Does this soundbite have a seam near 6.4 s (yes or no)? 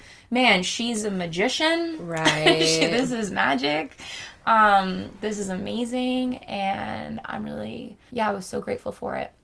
no